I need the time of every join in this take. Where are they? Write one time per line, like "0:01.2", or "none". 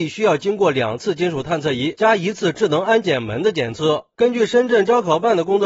0:04.1